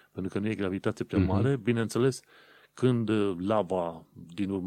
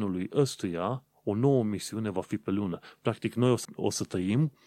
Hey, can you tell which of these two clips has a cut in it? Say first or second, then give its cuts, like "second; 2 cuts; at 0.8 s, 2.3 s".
second; 1 cut; at 3.6 s